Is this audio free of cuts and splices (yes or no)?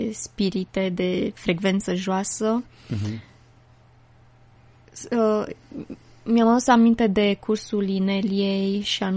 yes